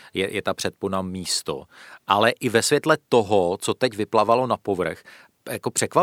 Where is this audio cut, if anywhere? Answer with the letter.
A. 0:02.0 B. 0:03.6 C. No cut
C